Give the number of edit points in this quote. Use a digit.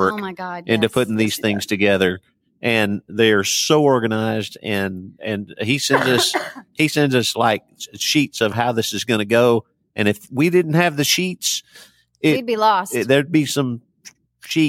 0